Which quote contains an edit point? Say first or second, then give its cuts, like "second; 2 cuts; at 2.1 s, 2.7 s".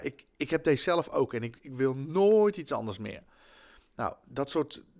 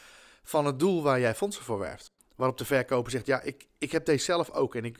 second; 1 cut; at 2.2 s